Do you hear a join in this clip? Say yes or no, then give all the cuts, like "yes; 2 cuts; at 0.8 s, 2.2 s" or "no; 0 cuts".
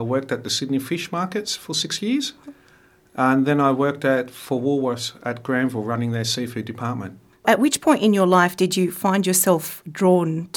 no; 0 cuts